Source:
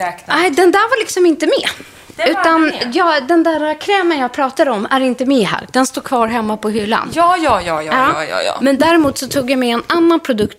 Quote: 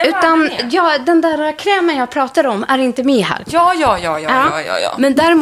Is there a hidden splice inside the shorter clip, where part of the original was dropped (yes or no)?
yes